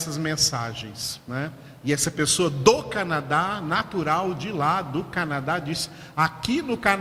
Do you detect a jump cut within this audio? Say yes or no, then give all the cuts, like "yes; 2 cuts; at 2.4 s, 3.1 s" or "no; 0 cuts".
no; 0 cuts